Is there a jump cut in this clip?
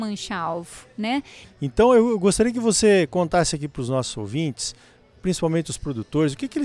yes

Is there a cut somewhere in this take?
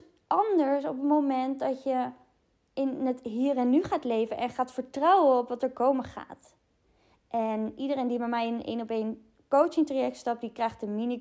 yes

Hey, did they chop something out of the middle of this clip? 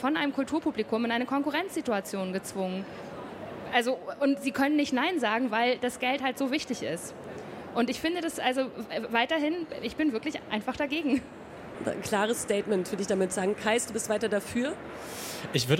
no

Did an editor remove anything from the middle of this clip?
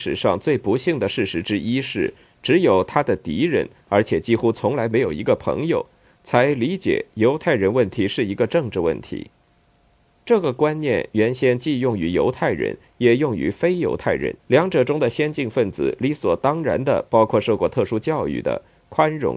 yes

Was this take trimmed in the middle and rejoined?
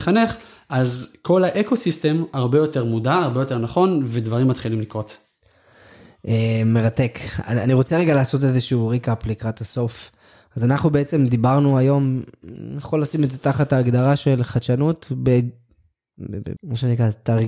yes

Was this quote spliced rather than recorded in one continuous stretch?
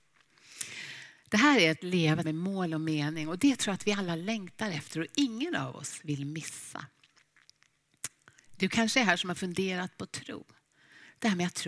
yes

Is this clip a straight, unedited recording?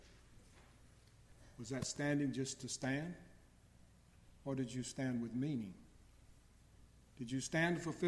yes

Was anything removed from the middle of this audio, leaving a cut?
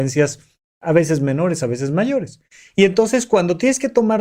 no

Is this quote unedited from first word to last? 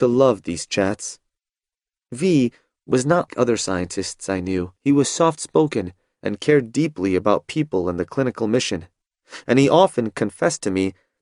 no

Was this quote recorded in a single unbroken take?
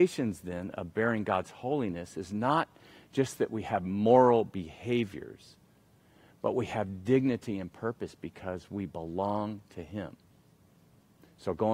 yes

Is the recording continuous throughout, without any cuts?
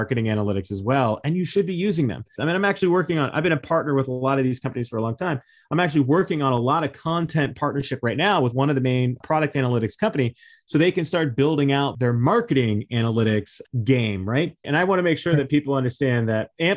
no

